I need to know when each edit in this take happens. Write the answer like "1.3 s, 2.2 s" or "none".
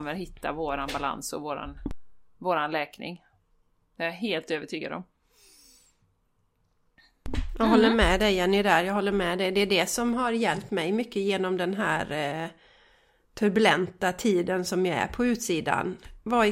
none